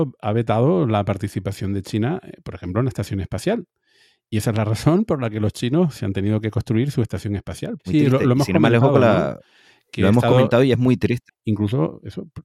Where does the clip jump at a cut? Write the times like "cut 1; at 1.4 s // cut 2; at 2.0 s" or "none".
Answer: cut 1; at 7.8 s // cut 2; at 11.3 s